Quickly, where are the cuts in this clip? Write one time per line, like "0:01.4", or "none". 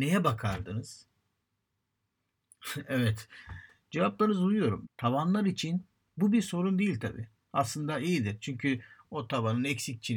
0:04.8